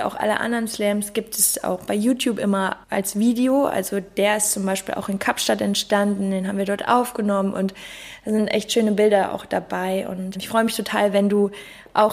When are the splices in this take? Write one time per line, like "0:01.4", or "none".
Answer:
0:02.8
0:10.3